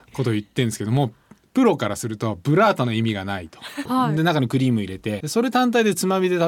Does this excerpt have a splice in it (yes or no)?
yes